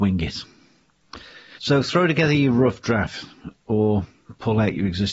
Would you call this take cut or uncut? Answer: cut